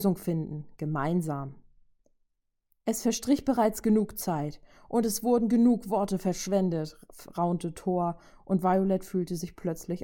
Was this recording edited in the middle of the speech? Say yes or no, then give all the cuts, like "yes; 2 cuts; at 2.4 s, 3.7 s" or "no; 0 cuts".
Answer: no; 0 cuts